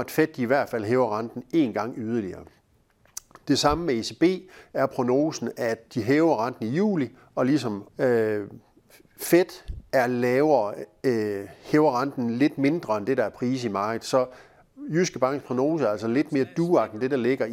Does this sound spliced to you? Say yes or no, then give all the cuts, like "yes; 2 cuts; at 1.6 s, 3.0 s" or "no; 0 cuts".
yes; 1 cut; at 7.9 s